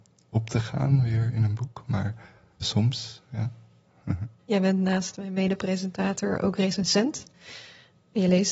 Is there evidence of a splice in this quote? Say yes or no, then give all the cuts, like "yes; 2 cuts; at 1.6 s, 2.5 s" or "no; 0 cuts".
yes; 2 cuts; at 2.6 s, 4.4 s